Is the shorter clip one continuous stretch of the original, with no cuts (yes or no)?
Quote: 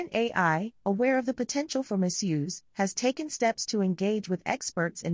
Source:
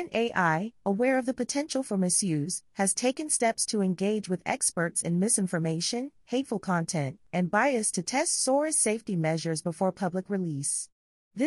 yes